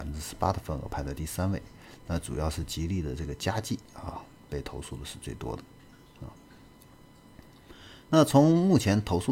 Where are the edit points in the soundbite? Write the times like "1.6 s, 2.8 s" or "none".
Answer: none